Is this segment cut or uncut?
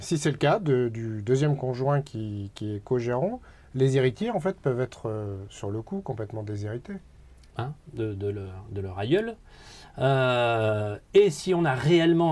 cut